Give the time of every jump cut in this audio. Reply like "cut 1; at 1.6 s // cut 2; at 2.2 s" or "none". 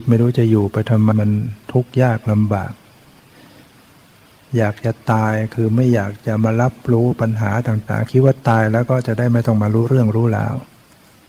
cut 1; at 1.1 s